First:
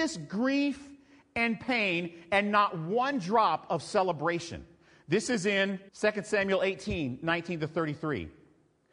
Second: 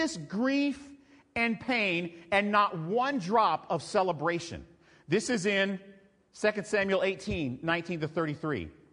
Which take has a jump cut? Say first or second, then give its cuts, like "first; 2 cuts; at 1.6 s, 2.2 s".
first; 1 cut; at 5.9 s